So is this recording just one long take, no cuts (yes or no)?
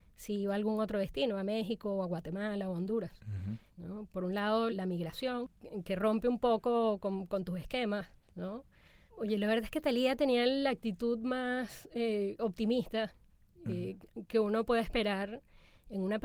no